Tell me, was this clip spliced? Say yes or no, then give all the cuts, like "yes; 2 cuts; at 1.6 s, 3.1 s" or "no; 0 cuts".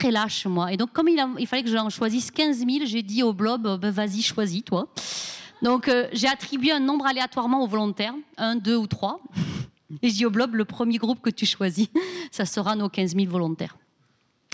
no; 0 cuts